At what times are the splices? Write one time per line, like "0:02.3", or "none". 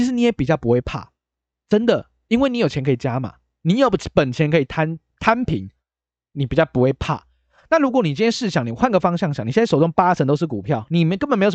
none